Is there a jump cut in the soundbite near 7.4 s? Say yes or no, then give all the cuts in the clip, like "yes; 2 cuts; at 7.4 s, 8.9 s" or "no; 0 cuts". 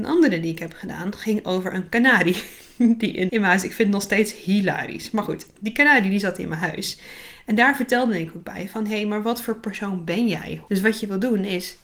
no; 2 cuts; at 3.3 s, 10.7 s